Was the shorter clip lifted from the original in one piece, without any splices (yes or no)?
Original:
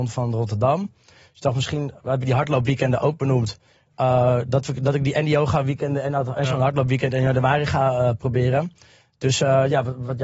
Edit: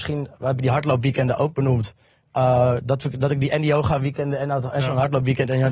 yes